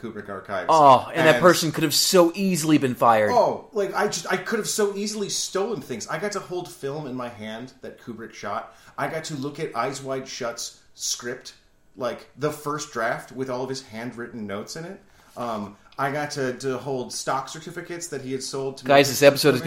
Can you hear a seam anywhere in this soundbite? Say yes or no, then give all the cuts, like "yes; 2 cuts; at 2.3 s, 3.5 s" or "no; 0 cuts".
yes; 1 cut; at 3.7 s